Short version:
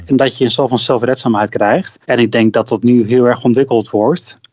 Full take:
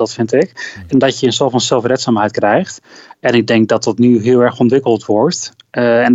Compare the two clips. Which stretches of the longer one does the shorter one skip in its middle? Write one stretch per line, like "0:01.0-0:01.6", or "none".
0:02.8-0:03.2